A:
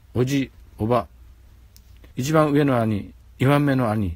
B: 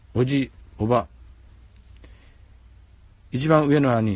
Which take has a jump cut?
A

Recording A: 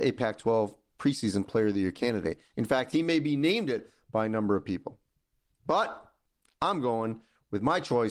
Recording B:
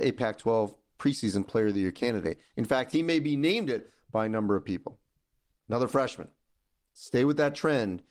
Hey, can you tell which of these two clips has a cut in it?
B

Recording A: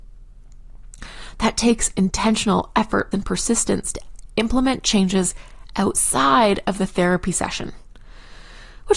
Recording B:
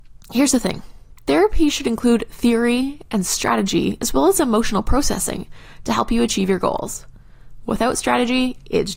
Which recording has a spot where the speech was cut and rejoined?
A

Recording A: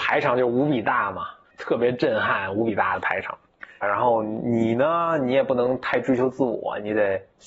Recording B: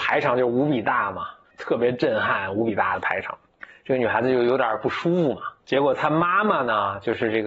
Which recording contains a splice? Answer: A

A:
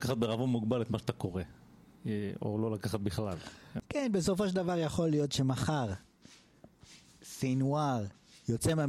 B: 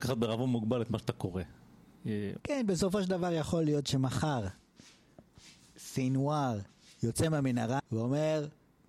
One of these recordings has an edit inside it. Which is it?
B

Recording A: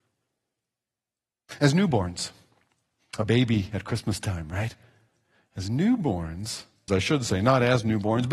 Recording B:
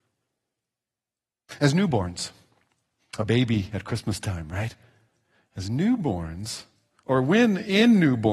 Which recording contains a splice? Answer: A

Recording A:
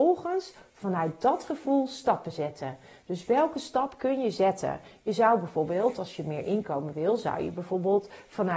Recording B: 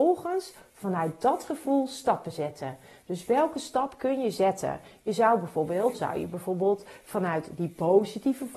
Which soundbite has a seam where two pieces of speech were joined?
B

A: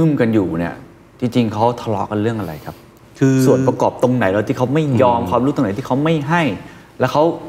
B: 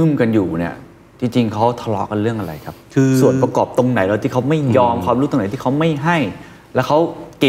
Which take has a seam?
B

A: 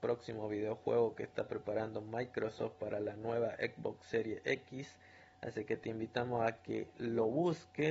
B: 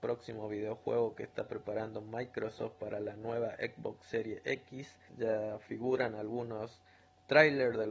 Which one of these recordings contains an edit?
B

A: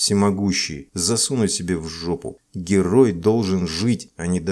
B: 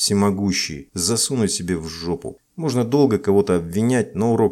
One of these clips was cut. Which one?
B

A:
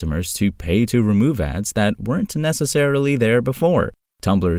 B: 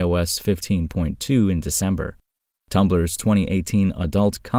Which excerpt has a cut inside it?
B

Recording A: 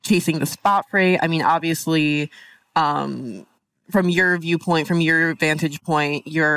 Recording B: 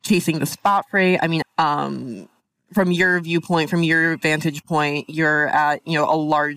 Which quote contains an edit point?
B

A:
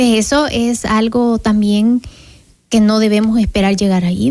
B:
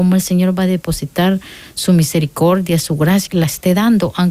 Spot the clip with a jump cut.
B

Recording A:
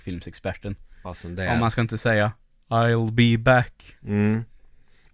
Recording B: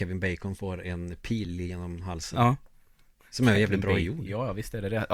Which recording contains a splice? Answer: A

